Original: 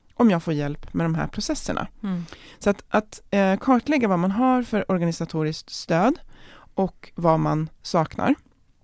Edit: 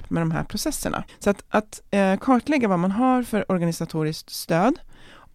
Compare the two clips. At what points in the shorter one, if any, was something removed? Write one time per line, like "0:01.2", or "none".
0:01.1